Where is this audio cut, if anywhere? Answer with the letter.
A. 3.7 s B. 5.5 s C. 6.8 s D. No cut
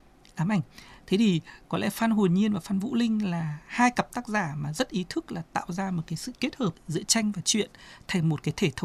C